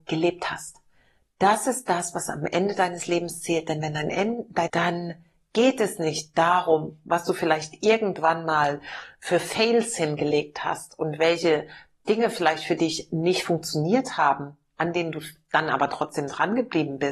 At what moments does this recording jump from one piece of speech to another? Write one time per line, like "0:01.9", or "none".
0:04.7